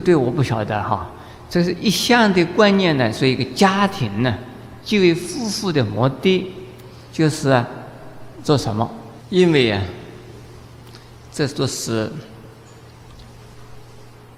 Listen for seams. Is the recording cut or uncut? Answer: cut